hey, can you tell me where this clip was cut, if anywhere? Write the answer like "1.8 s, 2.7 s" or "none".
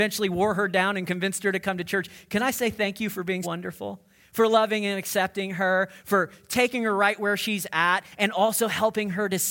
3.4 s